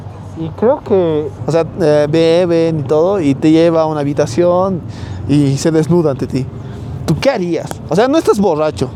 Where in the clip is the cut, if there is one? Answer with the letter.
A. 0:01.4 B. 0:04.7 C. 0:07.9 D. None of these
A